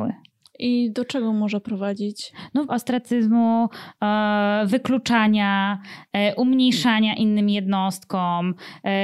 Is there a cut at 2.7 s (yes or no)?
yes